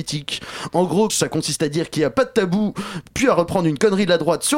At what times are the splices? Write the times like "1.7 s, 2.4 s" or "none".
1.1 s